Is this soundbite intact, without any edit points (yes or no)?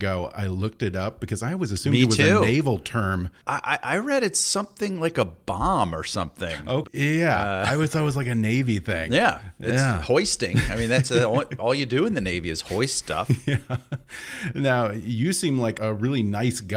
no